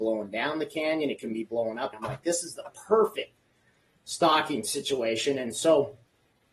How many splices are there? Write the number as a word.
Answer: one